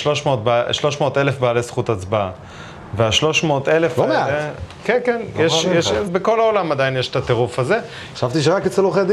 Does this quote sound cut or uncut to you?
cut